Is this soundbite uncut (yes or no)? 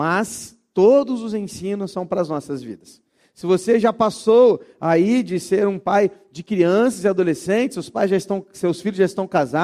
yes